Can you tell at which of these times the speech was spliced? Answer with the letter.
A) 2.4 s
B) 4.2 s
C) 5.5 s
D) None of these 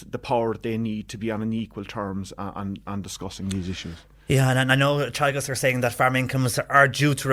D